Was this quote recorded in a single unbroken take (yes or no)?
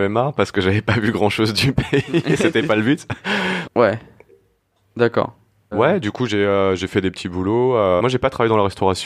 no